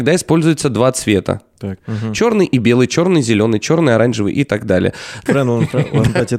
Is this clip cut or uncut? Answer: cut